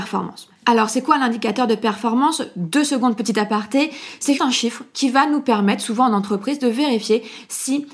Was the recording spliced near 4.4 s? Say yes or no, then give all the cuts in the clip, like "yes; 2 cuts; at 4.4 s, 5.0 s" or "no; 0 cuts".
yes; 1 cut; at 4.4 s